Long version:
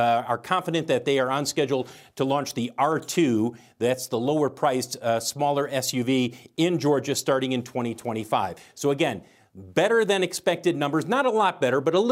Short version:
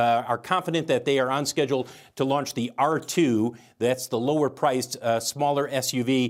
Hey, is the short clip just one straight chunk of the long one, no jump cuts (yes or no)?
yes